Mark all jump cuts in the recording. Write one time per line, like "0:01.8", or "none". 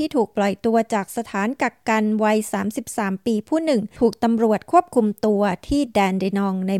none